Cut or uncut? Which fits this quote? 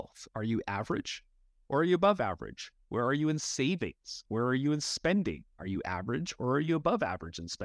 cut